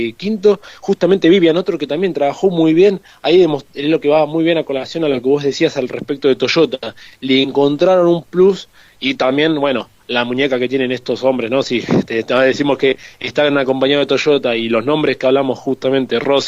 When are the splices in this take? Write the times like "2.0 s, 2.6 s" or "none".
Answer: none